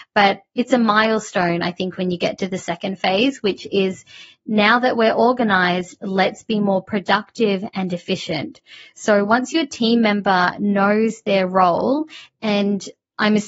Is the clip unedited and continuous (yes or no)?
yes